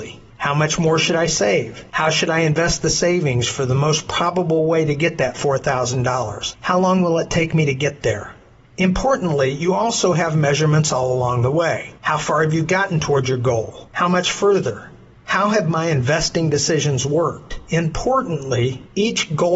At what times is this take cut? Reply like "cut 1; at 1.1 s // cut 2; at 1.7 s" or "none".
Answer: none